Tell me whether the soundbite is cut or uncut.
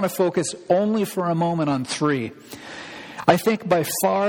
uncut